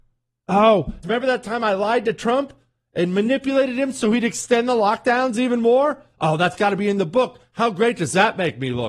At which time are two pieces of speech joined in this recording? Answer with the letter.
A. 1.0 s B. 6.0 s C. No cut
A